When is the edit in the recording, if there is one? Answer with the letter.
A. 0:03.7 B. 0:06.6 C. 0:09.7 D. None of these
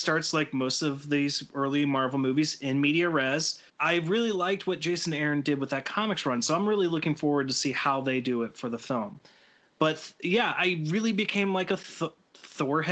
A